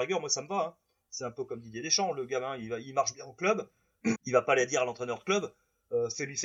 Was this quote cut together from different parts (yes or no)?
yes